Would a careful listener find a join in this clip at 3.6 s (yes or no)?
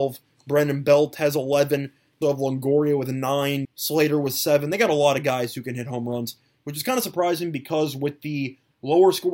yes